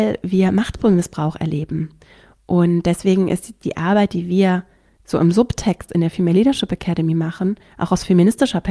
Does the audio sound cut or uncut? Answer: uncut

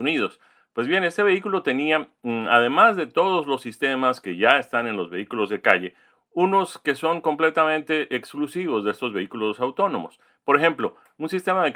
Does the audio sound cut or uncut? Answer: uncut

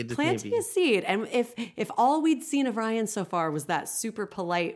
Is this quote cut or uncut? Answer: uncut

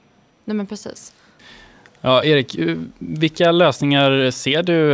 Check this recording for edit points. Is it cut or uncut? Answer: uncut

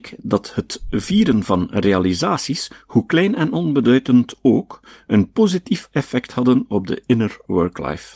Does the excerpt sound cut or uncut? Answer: uncut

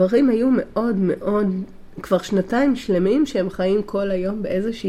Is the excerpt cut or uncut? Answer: uncut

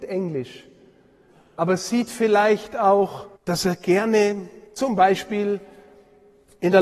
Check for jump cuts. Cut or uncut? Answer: cut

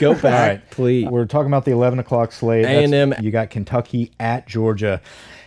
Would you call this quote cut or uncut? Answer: cut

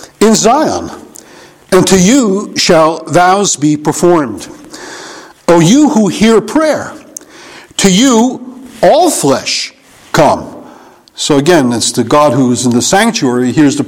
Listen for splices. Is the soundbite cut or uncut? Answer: uncut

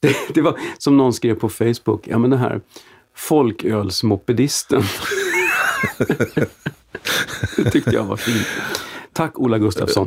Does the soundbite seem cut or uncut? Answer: uncut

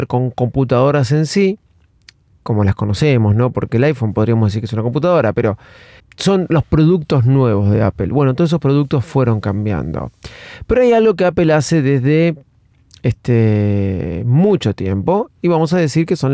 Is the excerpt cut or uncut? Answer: cut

